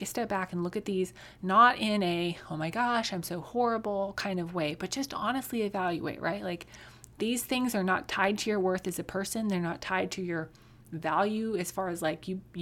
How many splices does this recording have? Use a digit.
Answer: 0